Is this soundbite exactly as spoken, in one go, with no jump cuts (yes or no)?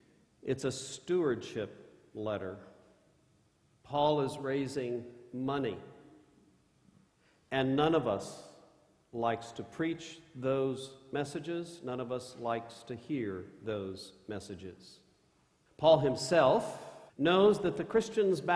no